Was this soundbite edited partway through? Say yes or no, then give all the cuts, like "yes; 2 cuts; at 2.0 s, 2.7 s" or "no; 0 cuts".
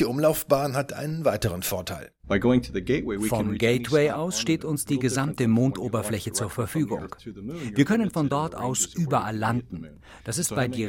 no; 0 cuts